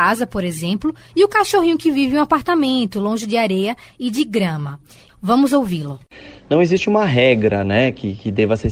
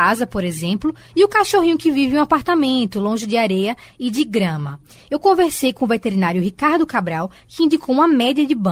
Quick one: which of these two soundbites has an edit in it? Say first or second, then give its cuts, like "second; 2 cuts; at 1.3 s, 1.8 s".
first; 1 cut; at 5.1 s